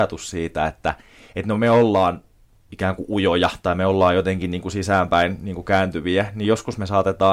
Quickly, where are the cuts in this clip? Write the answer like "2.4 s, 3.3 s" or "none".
none